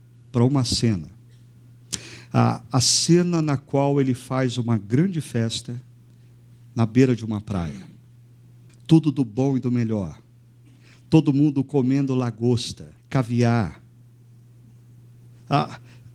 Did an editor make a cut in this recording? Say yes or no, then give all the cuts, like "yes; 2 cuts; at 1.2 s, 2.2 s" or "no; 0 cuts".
yes; 2 cuts; at 8.7 s, 13.0 s